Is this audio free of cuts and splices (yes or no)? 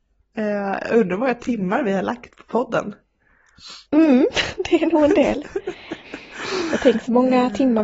no